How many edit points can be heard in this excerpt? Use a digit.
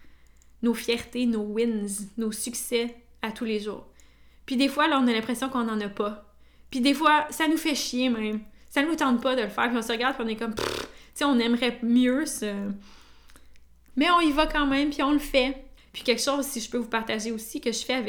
2